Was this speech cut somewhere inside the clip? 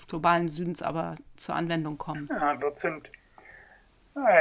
yes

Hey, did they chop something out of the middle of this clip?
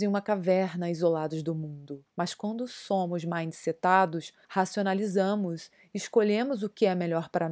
yes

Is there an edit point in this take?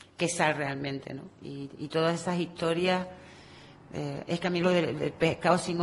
no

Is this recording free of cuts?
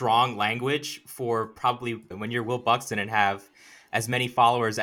no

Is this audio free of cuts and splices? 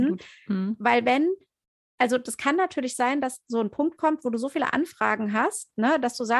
yes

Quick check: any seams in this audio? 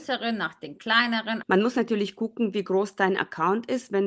yes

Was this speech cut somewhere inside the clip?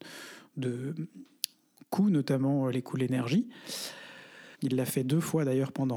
yes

